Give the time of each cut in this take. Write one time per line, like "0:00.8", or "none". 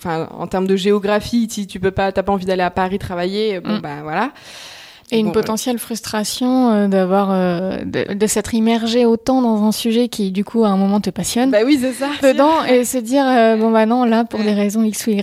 0:05.0
0:08.1
0:12.2